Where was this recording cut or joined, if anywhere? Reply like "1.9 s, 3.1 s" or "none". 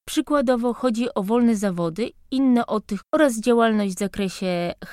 3.0 s